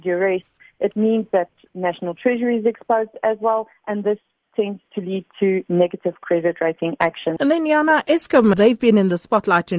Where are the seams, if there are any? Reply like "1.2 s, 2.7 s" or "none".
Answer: 7.4 s, 8.5 s

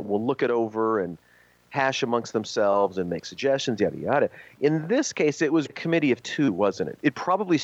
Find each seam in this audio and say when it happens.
5.7 s

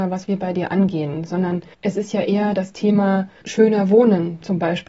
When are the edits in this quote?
1.7 s, 3.4 s

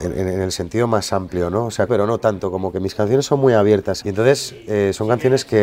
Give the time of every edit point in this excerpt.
1.9 s, 4.0 s

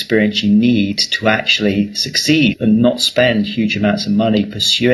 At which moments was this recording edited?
2.5 s

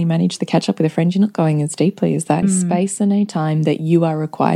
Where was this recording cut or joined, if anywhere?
2.4 s

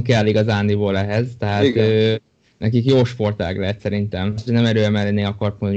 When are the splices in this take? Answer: 4.5 s

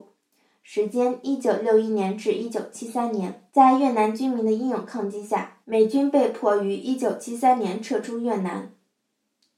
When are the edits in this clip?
3.5 s, 5.6 s

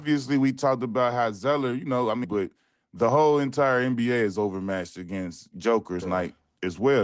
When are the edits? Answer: 2.2 s, 6.0 s

